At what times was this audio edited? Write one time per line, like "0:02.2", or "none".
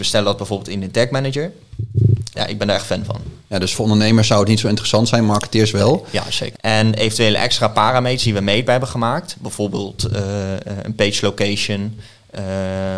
0:02.3
0:03.7
0:06.5